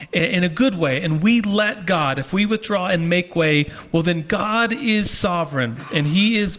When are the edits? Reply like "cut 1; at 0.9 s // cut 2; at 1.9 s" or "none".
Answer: none